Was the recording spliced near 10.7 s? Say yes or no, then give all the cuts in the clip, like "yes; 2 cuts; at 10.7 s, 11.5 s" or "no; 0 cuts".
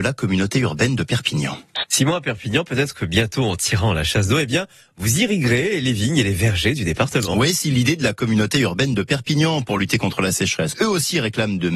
yes; 2 cuts; at 1.8 s, 10.7 s